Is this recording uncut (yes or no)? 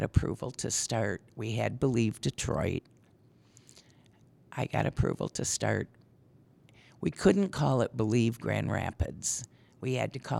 yes